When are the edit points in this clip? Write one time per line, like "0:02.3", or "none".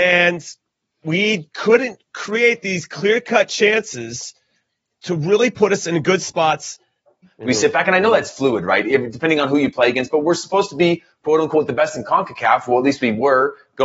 0:07.2